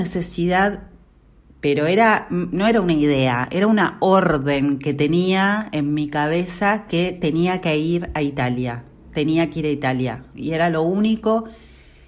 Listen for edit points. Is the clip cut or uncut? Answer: uncut